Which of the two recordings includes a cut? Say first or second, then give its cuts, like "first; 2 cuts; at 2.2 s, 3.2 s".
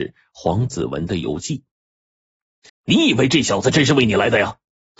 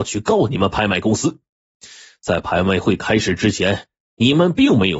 first; 1 cut; at 2.7 s